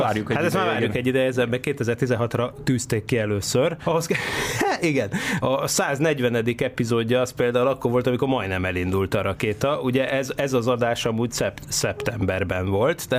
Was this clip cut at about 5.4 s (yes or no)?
yes